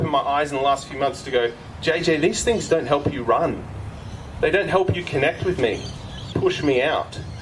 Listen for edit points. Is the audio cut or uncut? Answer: cut